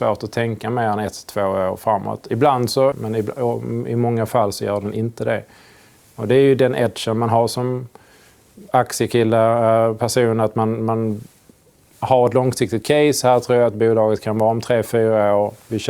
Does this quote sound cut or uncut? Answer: cut